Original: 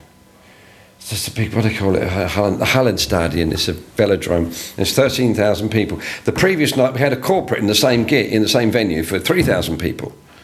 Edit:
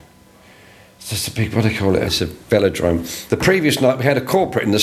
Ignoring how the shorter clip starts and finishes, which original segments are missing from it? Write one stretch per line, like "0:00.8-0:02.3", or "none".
0:02.0-0:03.5
0:04.7-0:06.2